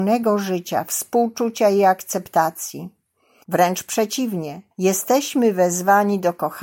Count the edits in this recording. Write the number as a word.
two